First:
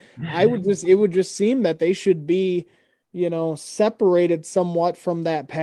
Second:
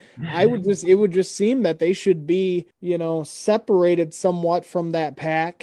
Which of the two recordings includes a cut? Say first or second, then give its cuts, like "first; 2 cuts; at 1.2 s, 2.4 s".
second; 1 cut; at 2.7 s